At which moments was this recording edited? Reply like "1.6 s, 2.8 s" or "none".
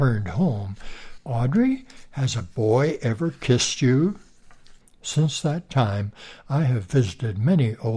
1.2 s, 4.8 s